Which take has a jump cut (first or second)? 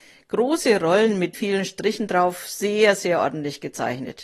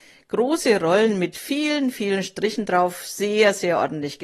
first